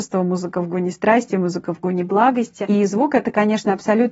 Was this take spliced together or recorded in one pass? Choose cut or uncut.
uncut